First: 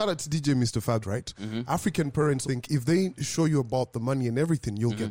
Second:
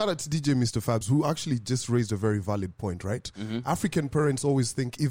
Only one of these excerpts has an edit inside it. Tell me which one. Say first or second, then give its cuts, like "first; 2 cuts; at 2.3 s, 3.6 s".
first; 2 cuts; at 1.0 s, 2.4 s